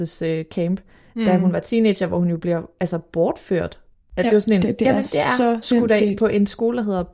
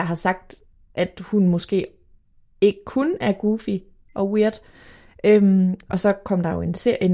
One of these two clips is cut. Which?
first; 2 cuts; at 4.6 s, 5.6 s

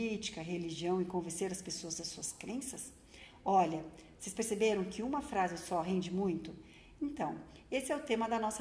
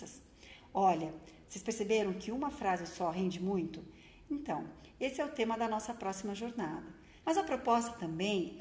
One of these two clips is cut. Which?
second; 1 cut; at 7.2 s

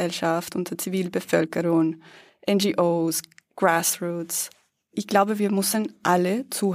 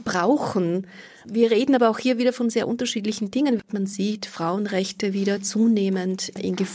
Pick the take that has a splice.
second; 1 cut; at 3.6 s

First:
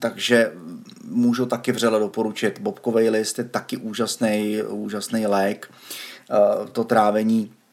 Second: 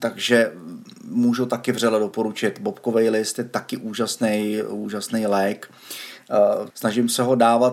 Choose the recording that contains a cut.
second; 1 cut; at 6.7 s

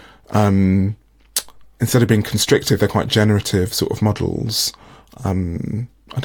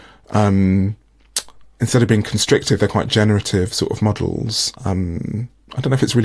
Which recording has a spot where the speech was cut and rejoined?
second; 1 cut; at 4.7 s

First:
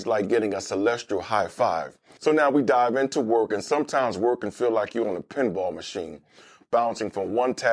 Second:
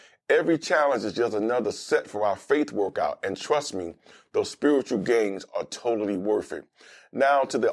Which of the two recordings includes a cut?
first; 1 cut; at 2.2 s

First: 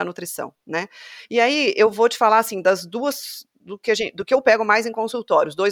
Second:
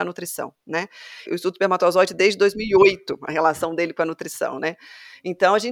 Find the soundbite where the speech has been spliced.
second; 1 cut; at 1.3 s

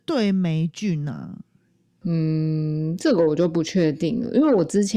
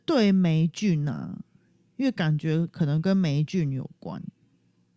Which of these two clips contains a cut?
first; 1 cut; at 1.9 s

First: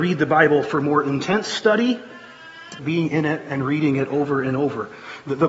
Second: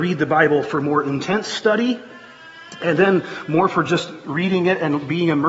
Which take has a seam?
first; 1 cut; at 2.8 s

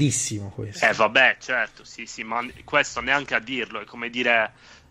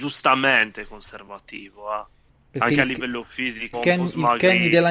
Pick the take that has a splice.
second; 1 cut; at 3.7 s

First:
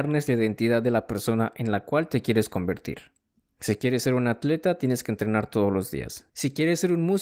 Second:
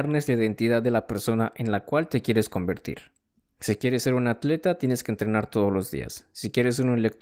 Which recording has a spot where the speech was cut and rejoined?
first; 1 cut; at 6.3 s

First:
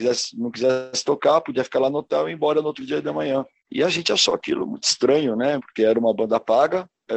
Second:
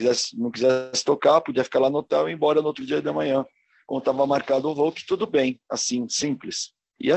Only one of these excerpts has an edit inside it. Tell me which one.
first; 2 cuts; at 3.6 s, 5.6 s

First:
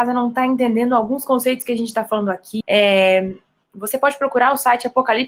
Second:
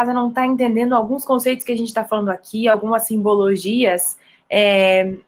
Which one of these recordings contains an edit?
first; 1 cut; at 2.6 s

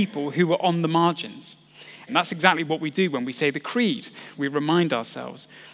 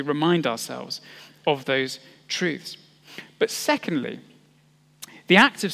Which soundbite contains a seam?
first; 2 cuts; at 2.1 s, 4.3 s

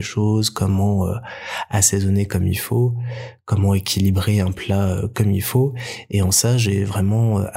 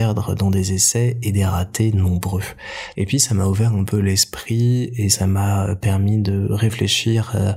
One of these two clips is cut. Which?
second; 1 cut; at 2.9 s

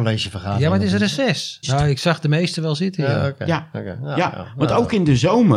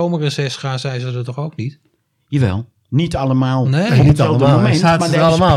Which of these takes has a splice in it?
first; 1 cut; at 1.6 s

